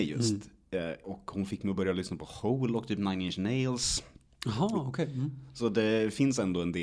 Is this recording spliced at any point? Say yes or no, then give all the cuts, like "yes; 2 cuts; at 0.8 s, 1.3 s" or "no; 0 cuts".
yes; 1 cut; at 1.0 s